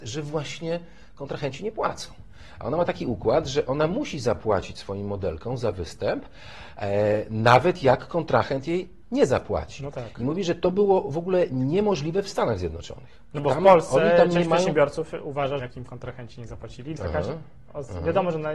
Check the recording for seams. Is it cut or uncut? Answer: cut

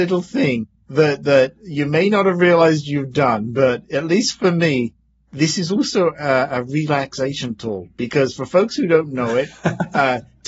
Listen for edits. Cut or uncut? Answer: uncut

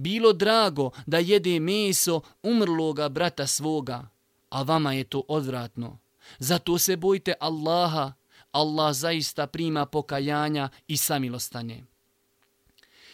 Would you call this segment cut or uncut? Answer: uncut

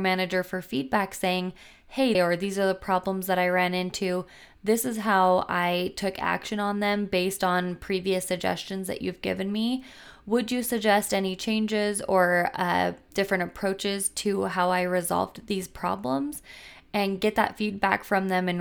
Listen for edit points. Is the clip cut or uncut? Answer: cut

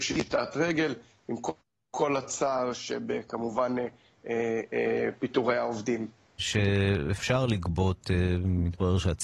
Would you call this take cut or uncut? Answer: cut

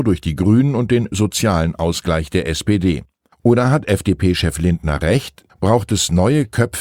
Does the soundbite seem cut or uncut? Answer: cut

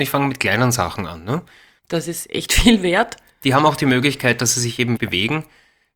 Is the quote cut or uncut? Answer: cut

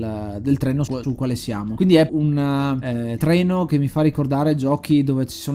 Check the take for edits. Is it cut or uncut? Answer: cut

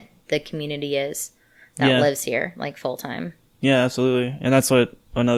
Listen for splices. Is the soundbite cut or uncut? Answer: uncut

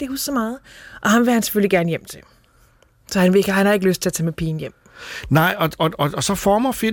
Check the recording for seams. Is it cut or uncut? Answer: uncut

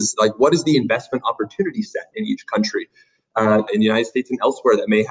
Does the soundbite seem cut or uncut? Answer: cut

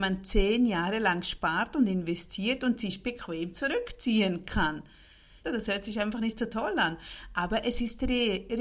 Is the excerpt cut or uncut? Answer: cut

